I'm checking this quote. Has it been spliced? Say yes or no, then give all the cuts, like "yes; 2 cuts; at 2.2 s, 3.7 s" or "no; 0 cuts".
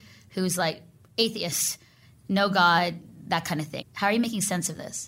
yes; 1 cut; at 3.8 s